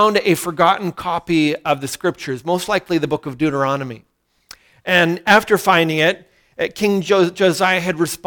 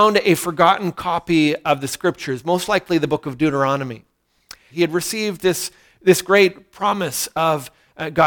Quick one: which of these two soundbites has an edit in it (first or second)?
second